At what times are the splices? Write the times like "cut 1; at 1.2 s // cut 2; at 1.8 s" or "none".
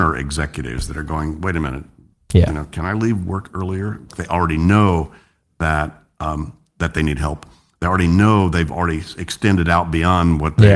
cut 1; at 4.1 s